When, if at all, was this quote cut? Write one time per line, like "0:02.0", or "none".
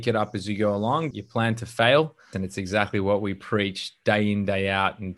0:01.1
0:02.3